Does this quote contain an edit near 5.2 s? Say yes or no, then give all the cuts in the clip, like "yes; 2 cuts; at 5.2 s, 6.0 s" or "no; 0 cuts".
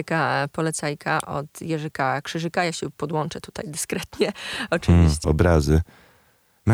yes; 1 cut; at 5.2 s